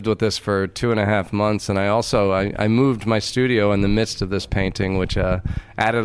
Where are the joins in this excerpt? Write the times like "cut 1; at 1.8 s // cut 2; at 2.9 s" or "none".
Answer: none